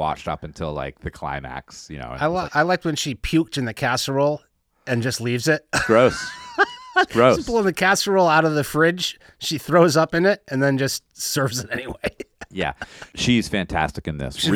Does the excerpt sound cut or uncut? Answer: cut